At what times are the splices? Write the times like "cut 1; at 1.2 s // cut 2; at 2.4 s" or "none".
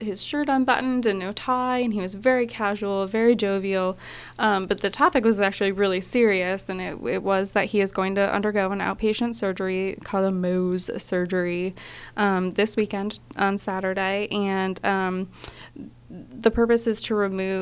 none